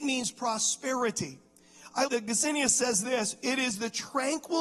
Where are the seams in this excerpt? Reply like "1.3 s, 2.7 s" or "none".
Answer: 2.1 s